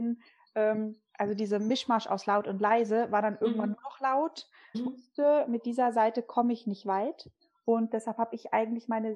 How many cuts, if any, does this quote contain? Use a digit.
1